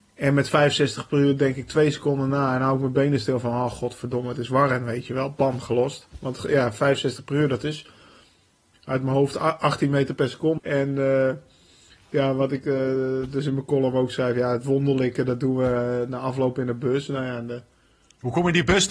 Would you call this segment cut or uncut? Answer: cut